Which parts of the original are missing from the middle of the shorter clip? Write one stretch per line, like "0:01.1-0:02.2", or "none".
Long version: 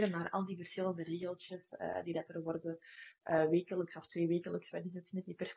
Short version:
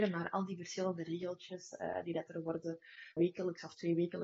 0:03.2-0:03.5